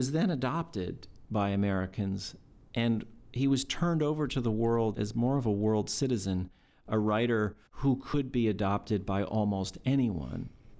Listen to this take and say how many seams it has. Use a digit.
2